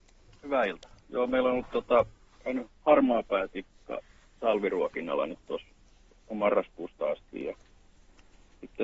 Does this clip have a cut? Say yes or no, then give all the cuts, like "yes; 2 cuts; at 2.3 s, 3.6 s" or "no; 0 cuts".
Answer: yes; 1 cut; at 1.0 s